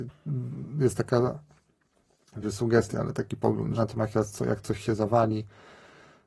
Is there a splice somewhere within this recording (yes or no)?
yes